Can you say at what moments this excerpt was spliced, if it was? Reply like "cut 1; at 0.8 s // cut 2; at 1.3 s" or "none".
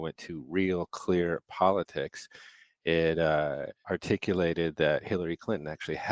cut 1; at 3.8 s